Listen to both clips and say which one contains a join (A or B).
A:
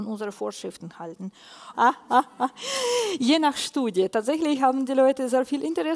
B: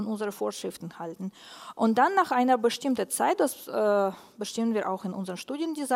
A